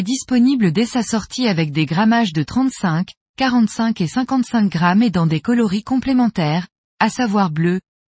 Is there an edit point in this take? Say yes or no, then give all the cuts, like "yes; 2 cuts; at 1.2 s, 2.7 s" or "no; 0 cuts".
no; 0 cuts